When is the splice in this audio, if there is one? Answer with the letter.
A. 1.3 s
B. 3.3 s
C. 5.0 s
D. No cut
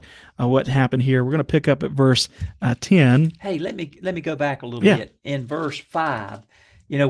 D